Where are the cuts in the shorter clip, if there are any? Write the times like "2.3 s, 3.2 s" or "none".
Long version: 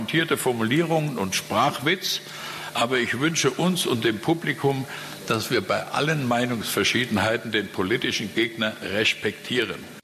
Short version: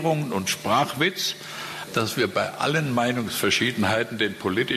1.9 s